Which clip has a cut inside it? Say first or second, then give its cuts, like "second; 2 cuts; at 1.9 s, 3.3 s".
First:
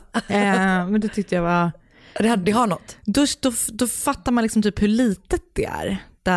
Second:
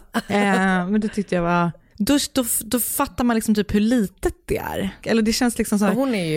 second; 2 cuts; at 1.9 s, 5.0 s